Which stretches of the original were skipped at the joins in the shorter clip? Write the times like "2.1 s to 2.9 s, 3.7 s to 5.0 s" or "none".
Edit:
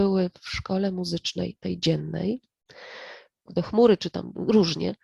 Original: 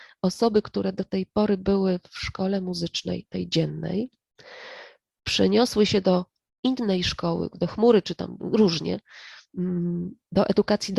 5.1 s to 7.5 s